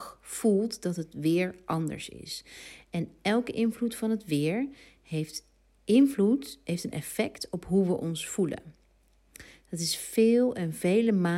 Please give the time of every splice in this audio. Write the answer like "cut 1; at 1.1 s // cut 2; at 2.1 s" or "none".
none